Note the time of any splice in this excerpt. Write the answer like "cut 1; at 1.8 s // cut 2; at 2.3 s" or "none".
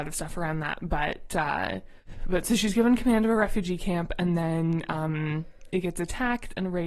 none